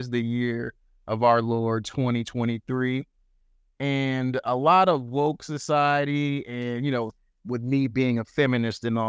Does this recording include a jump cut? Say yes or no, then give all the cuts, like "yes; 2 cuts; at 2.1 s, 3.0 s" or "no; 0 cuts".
no; 0 cuts